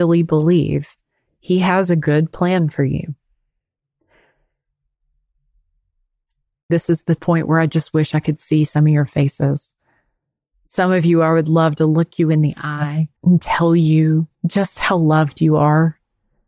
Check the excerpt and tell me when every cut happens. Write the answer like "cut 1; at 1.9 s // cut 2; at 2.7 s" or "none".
cut 1; at 13.2 s // cut 2; at 14.3 s